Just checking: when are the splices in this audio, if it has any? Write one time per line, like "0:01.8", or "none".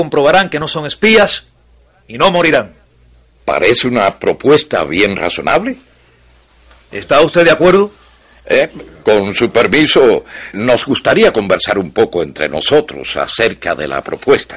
0:09.0
0:10.5